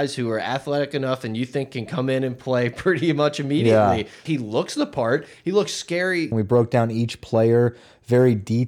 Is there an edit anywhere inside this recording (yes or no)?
yes